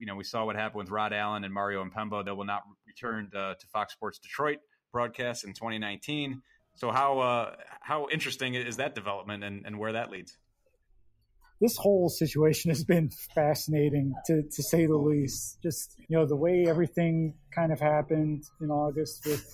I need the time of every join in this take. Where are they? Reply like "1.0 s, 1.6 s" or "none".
16.1 s